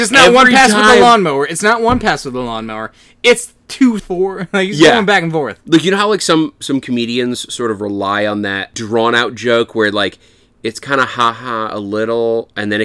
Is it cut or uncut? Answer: cut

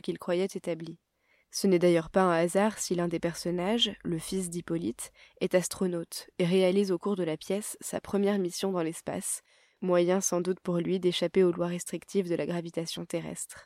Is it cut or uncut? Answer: cut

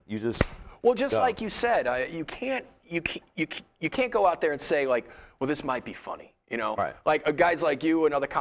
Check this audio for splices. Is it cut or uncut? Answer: uncut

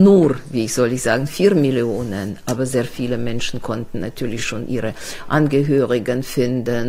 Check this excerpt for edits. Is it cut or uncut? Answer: uncut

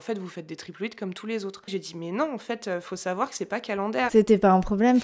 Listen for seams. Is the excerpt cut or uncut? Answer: cut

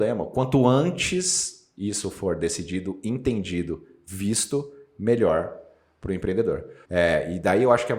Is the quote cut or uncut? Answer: cut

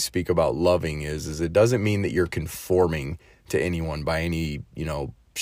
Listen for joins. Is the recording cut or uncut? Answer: uncut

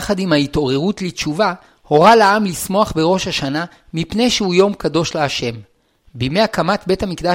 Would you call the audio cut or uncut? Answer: uncut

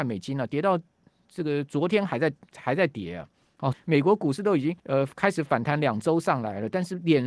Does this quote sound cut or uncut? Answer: cut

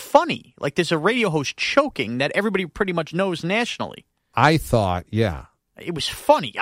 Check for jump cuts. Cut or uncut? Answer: uncut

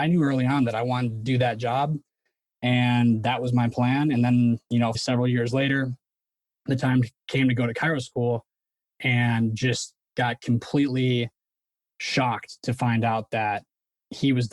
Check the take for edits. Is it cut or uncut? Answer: cut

